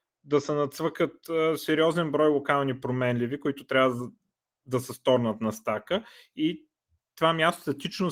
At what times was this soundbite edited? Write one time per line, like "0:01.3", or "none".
none